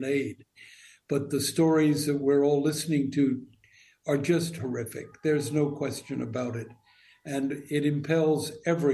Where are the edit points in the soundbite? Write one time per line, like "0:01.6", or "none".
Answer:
none